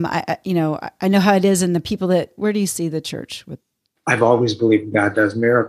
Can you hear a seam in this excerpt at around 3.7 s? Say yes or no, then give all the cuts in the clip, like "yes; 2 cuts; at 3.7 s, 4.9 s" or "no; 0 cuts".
no; 1 cut; at 2.4 s